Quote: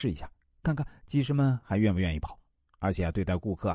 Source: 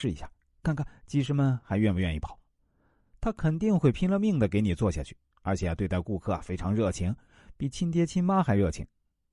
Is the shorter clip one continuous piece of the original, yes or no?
no